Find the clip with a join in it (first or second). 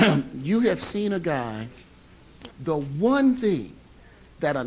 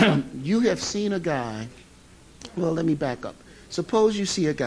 first